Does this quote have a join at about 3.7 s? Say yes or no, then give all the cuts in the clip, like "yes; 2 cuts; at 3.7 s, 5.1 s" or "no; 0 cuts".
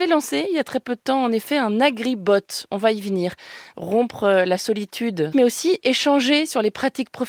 yes; 2 cuts; at 3.7 s, 5.3 s